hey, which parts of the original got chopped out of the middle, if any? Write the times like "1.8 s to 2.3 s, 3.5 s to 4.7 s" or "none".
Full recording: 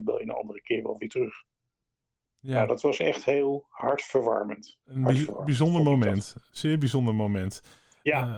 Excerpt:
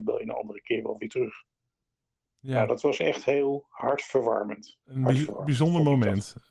none